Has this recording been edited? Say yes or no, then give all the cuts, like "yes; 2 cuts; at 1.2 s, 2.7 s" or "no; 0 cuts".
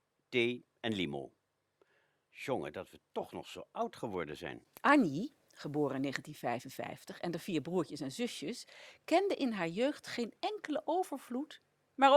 no; 0 cuts